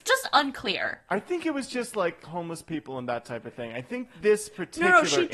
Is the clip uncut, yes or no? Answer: no